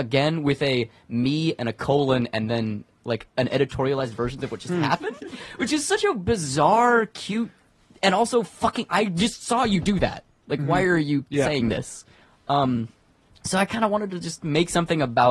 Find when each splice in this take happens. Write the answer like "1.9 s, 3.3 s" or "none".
3.3 s